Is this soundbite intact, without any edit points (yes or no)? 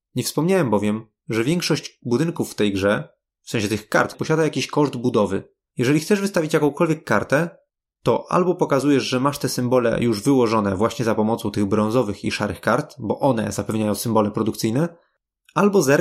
no